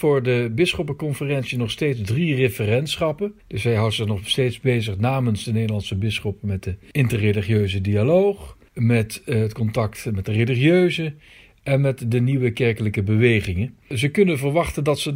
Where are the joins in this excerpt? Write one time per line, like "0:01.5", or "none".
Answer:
0:03.4